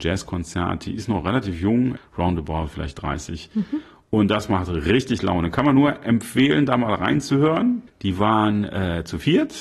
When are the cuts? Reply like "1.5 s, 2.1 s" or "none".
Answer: 2.0 s, 7.9 s